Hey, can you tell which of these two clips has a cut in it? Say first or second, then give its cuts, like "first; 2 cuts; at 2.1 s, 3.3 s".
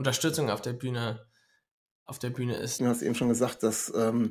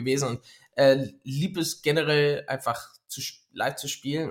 first; 1 cut; at 2.8 s